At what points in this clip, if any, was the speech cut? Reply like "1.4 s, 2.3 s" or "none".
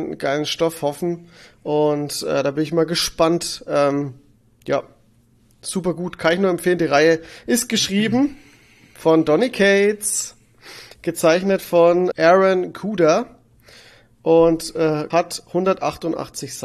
12.1 s, 15.1 s